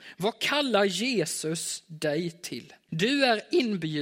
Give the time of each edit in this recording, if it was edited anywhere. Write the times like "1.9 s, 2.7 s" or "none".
2.9 s